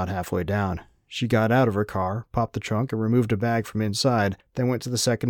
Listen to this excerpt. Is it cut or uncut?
uncut